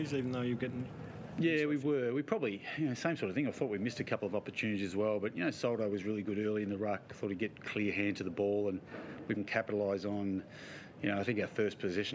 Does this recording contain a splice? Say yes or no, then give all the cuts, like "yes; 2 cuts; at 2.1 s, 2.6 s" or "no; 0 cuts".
yes; 1 cut; at 9.4 s